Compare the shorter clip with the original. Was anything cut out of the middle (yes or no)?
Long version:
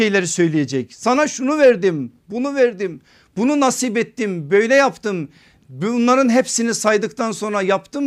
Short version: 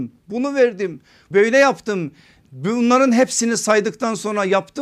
yes